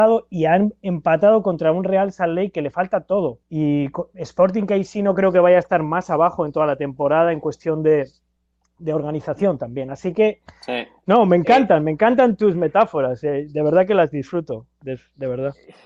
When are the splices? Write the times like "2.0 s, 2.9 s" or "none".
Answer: 3.4 s, 11.0 s